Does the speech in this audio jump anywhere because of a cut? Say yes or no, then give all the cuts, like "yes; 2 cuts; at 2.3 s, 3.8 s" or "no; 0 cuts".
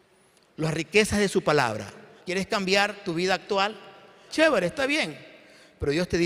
yes; 2 cuts; at 2.2 s, 4.3 s